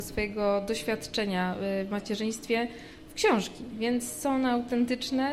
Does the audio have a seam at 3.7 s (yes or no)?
no